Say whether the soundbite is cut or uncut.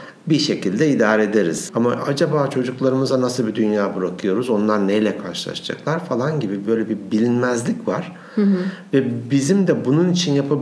cut